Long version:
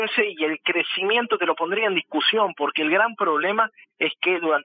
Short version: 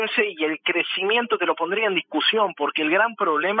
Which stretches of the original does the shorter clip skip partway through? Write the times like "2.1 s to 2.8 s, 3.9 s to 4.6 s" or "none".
none